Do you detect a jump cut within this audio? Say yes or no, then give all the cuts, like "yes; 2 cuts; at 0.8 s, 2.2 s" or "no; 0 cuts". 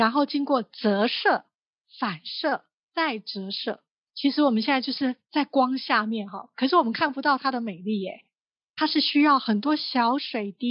no; 0 cuts